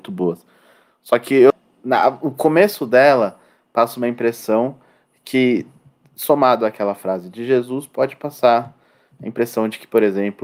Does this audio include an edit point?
no; 0 cuts

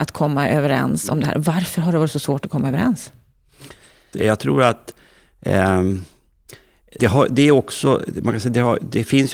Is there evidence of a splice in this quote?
yes; 2 cuts; at 4.1 s, 7.0 s

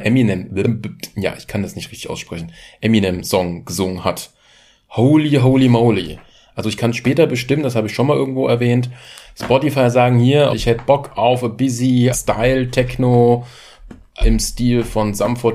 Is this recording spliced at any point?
yes; 3 cuts; at 10.5 s, 12.1 s, 14.2 s

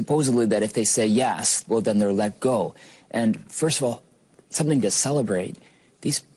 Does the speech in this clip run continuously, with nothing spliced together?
yes; 0 cuts

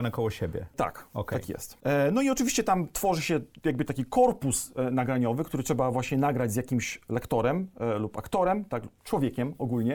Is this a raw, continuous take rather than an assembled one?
yes; 0 cuts

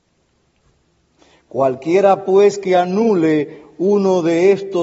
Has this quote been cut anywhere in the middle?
no; 0 cuts

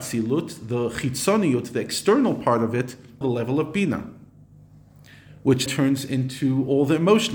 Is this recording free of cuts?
no; 2 cuts; at 3.2 s, 5.7 s

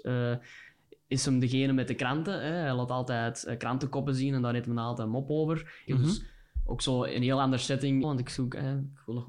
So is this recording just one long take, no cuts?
no; 2 cuts; at 5.9 s, 8.0 s

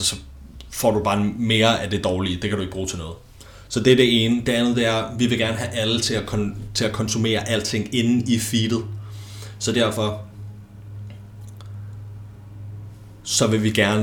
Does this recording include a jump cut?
no; 0 cuts

